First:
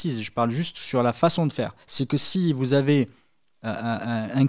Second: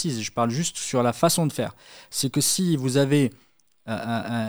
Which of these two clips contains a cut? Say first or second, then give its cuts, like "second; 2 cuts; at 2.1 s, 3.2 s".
first; 1 cut; at 1.8 s